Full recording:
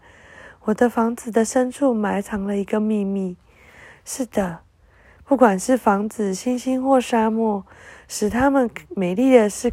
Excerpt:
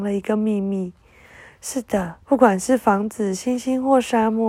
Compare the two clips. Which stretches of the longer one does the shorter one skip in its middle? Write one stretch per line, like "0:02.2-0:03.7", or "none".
0:04.7-0:05.2